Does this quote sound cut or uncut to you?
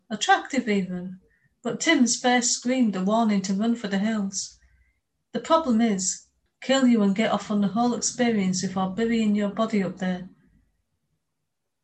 cut